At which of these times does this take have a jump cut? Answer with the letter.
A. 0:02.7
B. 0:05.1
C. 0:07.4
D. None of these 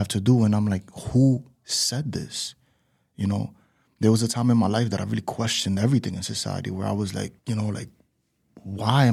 C